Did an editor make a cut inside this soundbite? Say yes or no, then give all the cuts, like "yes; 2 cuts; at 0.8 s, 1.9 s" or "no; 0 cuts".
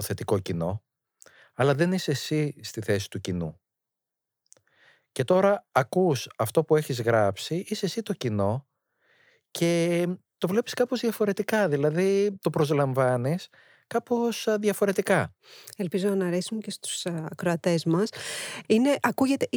yes; 2 cuts; at 10.3 s, 18.6 s